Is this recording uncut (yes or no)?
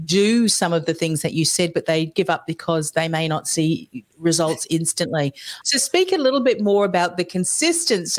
no